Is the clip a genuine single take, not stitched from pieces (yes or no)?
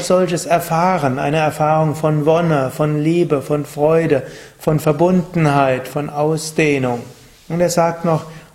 no